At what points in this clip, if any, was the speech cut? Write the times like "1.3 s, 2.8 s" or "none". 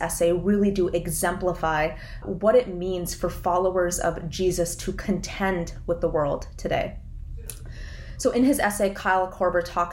2.2 s